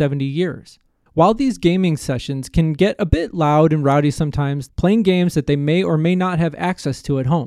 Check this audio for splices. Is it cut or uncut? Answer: cut